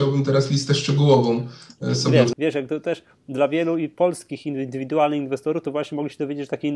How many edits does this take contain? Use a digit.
1